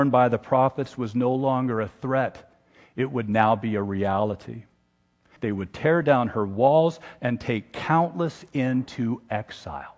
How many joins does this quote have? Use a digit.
2